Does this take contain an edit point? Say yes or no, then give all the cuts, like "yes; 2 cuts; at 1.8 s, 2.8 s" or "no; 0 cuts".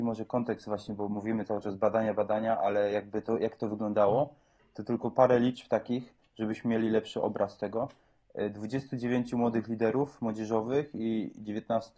no; 0 cuts